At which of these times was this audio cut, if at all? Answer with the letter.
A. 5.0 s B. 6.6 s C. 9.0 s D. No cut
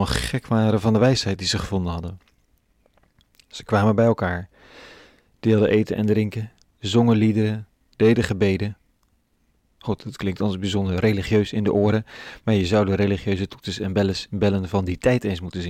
D